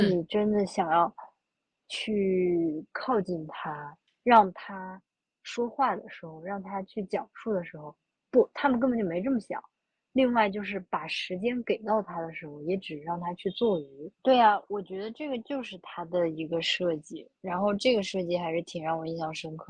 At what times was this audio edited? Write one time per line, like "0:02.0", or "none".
0:14.1